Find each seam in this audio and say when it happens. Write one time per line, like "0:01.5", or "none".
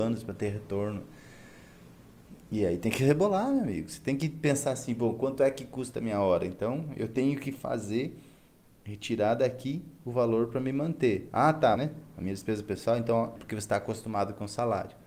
0:11.8
0:13.4